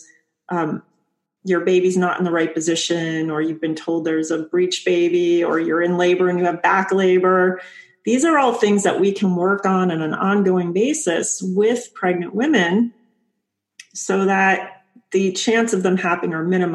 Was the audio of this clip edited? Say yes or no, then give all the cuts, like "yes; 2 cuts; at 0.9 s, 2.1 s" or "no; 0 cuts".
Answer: no; 0 cuts